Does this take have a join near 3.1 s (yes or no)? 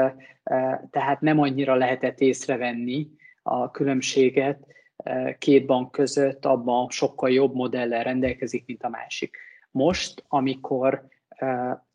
no